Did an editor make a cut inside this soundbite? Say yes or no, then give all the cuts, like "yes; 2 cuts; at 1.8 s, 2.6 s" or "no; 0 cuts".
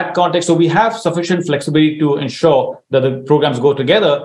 no; 0 cuts